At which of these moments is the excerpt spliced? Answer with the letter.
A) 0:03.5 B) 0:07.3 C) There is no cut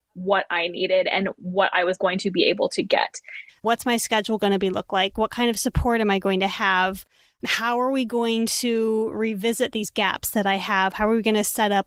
A